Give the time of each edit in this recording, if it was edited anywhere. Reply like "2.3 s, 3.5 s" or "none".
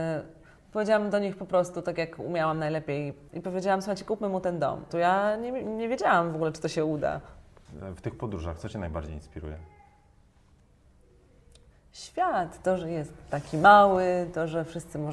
3.3 s, 4.9 s